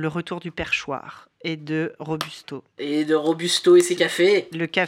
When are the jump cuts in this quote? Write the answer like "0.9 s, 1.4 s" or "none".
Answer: none